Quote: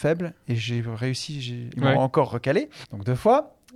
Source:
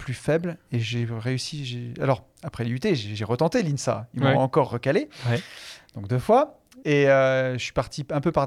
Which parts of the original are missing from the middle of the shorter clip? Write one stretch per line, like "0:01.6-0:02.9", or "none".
0:02.0-0:04.1
0:05.2-0:05.9